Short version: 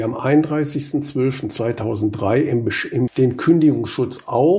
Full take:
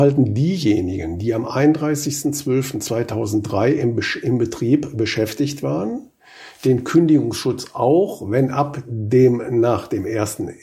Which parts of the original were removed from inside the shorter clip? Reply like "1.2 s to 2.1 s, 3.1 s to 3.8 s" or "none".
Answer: 4.4 s to 6.5 s